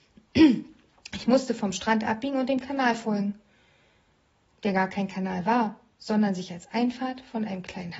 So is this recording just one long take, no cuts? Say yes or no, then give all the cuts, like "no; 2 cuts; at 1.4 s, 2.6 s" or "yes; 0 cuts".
yes; 0 cuts